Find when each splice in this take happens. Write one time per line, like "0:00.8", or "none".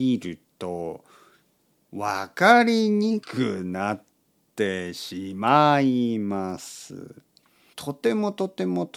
0:03.2
0:07.7